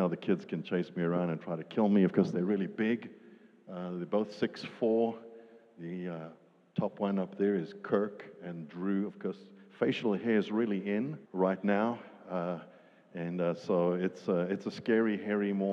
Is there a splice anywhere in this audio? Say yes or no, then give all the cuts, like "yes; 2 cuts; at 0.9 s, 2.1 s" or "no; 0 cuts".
yes; 1 cut; at 11.3 s